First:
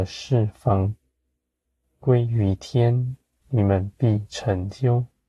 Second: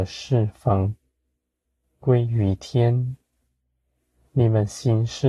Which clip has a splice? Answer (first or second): first